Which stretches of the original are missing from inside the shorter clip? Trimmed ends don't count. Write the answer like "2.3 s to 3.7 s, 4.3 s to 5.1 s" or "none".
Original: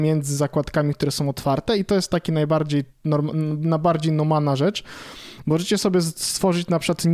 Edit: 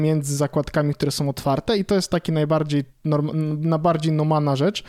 none